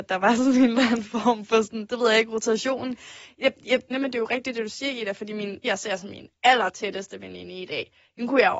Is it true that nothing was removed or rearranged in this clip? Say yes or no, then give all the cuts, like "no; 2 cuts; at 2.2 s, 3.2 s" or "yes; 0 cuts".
no; 2 cuts; at 3.9 s, 5.6 s